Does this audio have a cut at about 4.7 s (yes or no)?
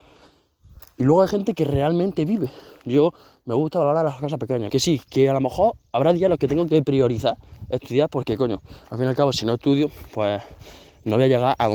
yes